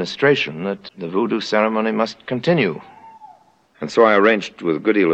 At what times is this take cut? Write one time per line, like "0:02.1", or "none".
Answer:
0:03.7